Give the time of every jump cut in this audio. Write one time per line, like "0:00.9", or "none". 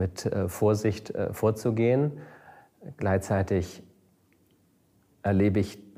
none